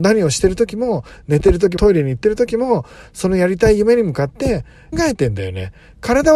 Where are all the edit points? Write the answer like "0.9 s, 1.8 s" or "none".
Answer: 1.8 s, 4.9 s